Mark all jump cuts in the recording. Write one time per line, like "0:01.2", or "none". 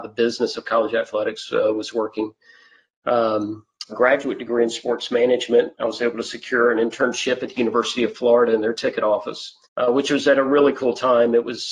0:03.9
0:09.7

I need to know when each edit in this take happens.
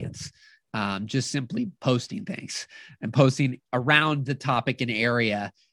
none

